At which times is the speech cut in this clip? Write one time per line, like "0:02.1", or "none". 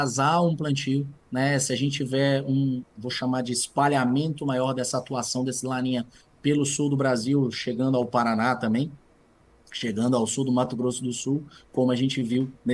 0:02.8

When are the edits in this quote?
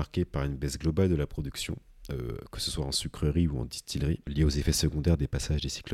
none

